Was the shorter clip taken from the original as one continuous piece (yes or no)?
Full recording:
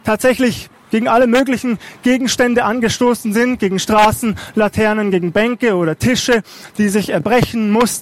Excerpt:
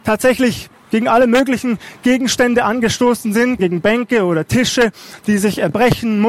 no